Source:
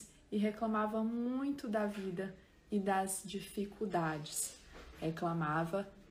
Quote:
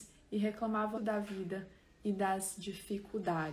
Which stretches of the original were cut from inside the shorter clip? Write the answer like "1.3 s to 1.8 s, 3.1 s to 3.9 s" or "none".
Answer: 0.9 s to 1.6 s